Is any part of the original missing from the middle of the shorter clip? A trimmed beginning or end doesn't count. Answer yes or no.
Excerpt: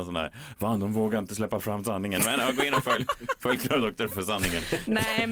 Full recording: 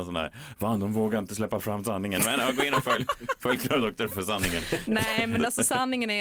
no